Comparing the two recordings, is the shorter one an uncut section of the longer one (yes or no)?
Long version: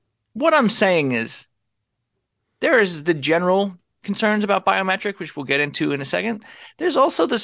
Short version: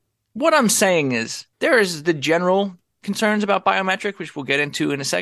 no